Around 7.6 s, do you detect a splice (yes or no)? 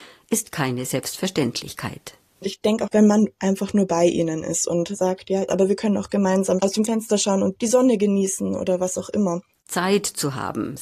yes